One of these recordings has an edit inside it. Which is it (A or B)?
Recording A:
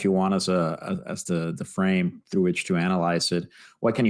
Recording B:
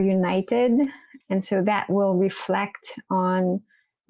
B